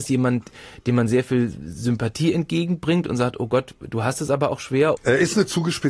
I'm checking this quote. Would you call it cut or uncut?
cut